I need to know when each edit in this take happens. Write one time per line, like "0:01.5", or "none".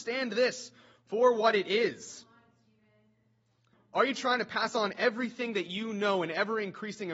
0:03.7